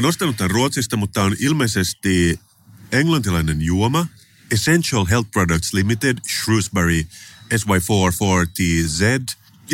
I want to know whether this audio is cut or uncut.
uncut